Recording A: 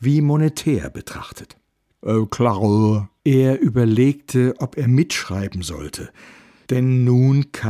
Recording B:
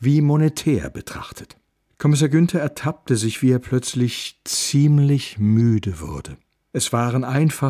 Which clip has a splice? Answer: A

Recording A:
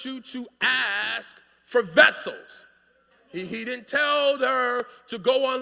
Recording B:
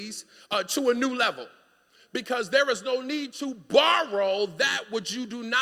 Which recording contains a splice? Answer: A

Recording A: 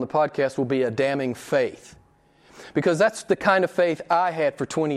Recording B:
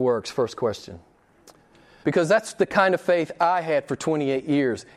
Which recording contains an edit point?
B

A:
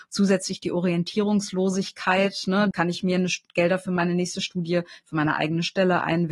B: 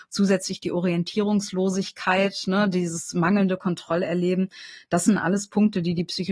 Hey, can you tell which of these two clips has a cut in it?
A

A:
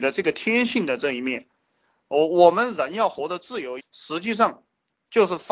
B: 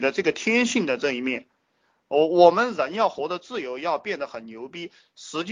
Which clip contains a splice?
A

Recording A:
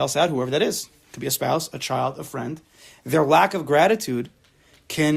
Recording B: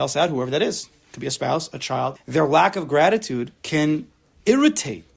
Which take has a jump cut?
B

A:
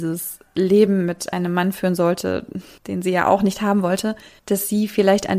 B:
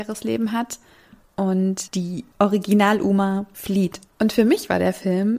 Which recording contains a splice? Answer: B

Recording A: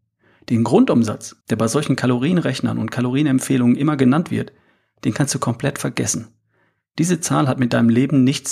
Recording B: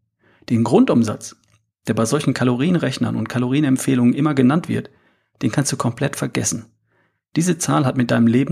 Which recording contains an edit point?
A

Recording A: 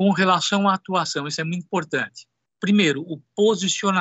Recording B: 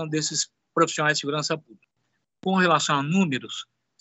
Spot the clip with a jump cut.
B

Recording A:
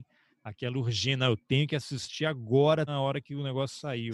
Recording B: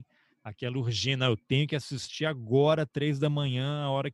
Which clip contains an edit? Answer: A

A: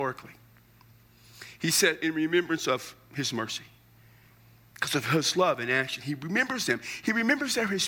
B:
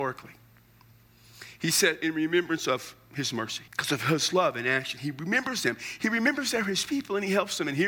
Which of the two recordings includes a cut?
B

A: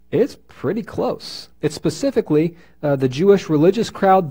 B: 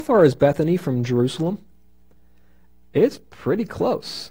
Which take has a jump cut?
A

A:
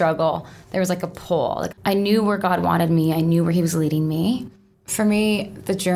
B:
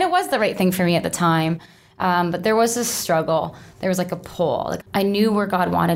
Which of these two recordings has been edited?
A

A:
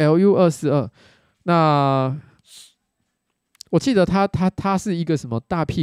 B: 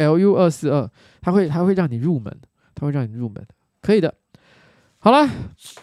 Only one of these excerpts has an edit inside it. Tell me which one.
B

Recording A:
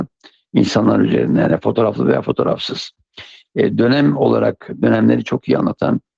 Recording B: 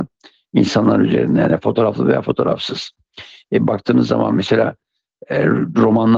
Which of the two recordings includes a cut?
A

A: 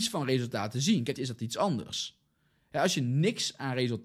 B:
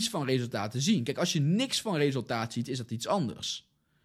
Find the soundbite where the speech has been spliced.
A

